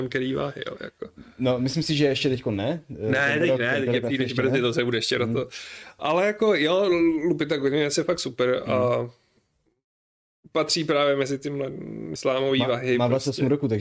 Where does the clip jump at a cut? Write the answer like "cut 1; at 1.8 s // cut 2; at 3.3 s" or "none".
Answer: cut 1; at 12.2 s

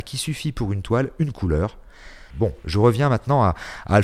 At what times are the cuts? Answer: cut 1; at 2.3 s

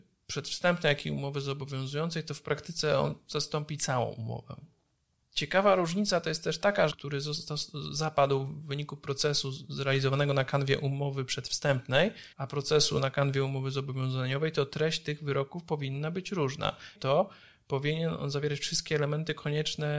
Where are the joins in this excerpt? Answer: cut 1; at 6.9 s // cut 2; at 12.3 s // cut 3; at 16.9 s

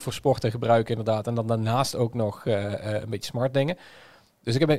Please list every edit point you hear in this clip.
none

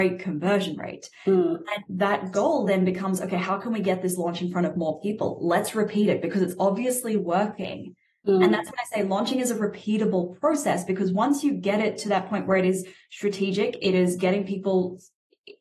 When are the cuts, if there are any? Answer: cut 1; at 1.8 s

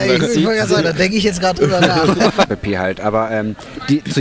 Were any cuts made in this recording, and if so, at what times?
cut 1; at 2.5 s

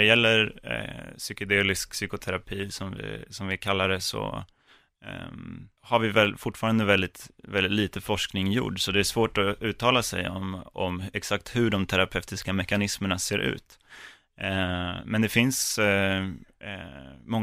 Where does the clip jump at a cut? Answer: cut 1; at 5.8 s

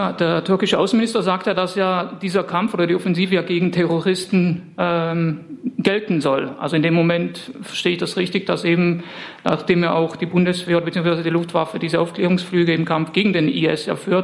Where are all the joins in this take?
none

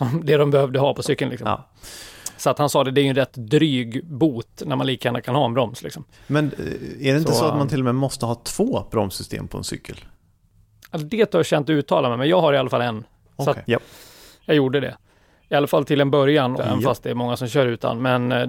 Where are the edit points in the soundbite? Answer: cut 1; at 13.6 s // cut 2; at 16.6 s

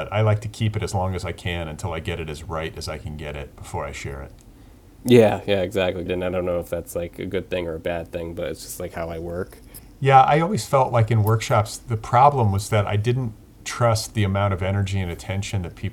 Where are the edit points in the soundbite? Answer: cut 1; at 6.1 s

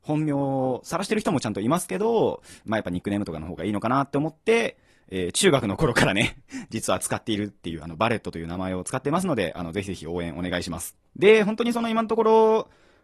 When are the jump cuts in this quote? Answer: cut 1; at 11.1 s

